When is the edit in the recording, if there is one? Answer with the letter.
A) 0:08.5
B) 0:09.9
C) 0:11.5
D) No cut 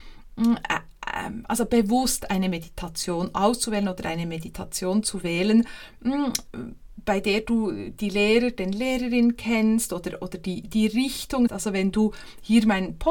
C